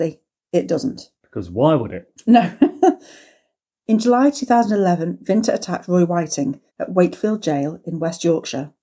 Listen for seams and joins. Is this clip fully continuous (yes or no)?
no